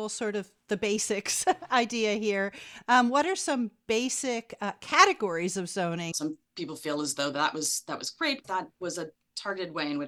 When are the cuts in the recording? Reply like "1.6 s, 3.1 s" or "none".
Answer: 6.1 s, 8.4 s